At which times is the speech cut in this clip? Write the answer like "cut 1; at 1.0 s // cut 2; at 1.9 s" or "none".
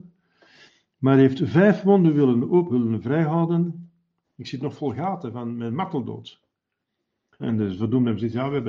cut 1; at 2.7 s // cut 2; at 4.2 s // cut 3; at 7.4 s